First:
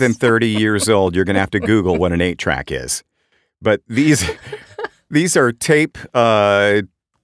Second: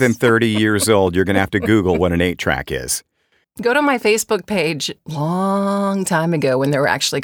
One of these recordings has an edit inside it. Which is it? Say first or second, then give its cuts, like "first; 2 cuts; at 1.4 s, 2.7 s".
second; 2 cuts; at 3.4 s, 5.0 s